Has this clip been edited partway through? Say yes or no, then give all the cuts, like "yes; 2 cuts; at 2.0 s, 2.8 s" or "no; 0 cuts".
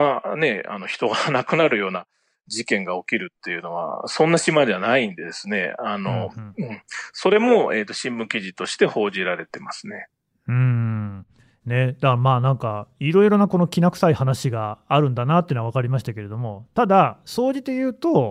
no; 0 cuts